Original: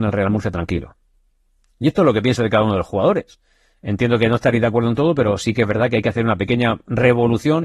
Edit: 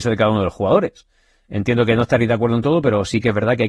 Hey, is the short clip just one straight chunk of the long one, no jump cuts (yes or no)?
yes